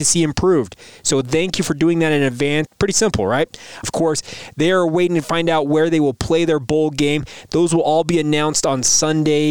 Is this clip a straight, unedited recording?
no; 2 cuts; at 2.7 s, 3.8 s

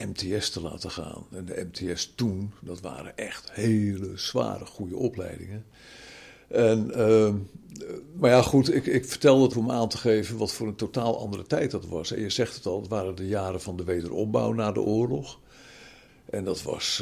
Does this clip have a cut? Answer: yes; 2 cuts; at 9.5 s, 16.1 s

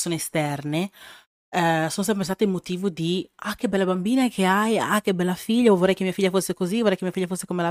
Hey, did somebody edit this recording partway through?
no; 0 cuts

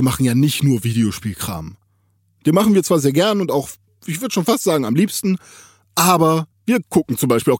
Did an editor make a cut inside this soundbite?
no; 0 cuts

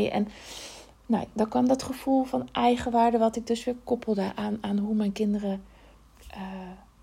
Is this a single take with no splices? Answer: yes; 0 cuts

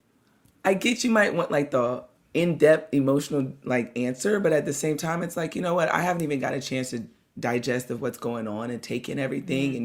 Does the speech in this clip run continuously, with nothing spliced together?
yes; 0 cuts

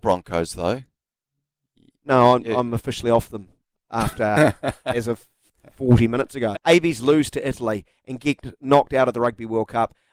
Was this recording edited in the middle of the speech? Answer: yes; 1 cut; at 6.5 s

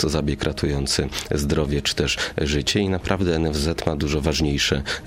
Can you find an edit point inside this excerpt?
no; 0 cuts

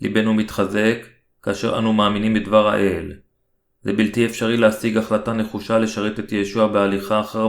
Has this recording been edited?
no; 0 cuts

